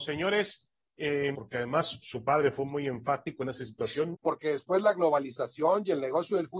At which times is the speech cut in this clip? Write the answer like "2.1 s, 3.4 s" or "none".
1.3 s, 4.1 s